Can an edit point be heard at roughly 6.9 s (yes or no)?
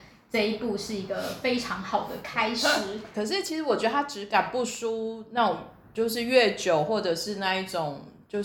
no